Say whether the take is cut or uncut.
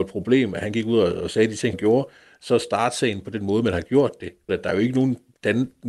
cut